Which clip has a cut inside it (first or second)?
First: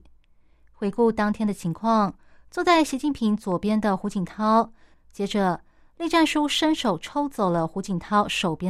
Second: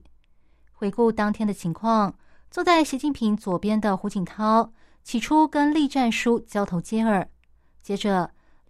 first